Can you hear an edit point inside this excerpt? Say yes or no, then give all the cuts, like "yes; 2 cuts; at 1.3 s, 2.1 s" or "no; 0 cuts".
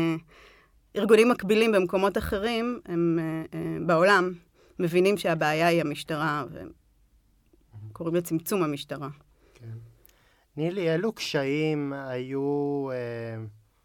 no; 0 cuts